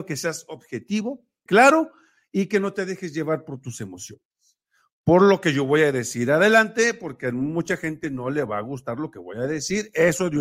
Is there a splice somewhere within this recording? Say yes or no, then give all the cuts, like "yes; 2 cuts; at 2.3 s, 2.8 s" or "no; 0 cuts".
yes; 1 cut; at 1.5 s